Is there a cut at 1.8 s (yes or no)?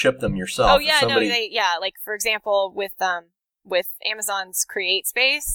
no